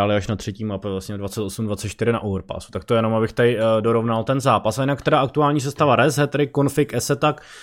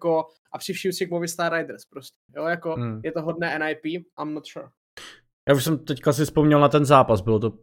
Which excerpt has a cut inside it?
second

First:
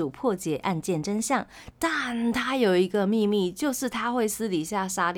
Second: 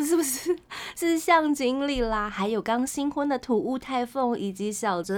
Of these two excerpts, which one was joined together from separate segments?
first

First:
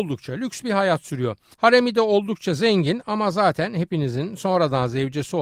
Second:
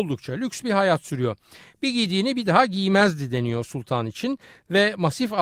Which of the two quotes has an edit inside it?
first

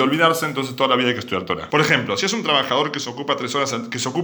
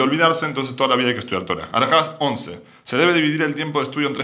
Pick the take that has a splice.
first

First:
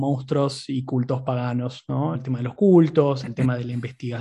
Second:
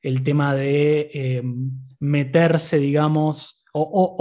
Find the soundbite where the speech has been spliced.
first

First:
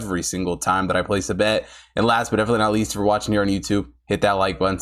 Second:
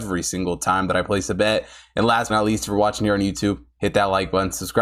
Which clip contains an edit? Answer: second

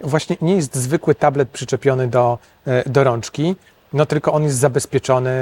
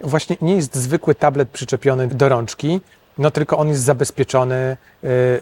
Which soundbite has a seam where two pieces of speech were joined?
second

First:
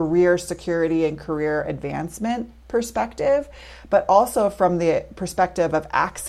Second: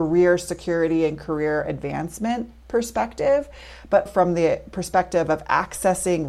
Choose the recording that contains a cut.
second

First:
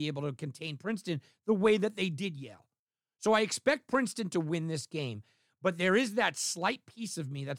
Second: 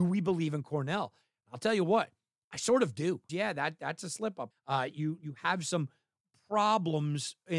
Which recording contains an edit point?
second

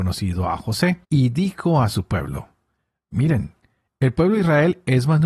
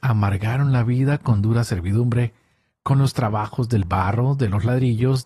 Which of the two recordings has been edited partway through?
first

